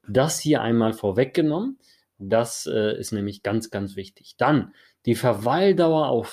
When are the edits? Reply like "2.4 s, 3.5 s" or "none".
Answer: none